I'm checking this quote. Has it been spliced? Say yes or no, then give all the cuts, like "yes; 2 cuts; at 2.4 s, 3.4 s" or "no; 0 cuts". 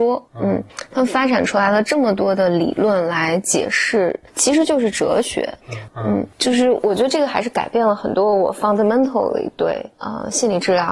yes; 2 cuts; at 4.3 s, 5.9 s